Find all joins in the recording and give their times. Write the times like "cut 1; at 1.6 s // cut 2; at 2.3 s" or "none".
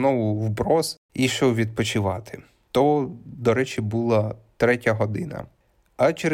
cut 1; at 1.3 s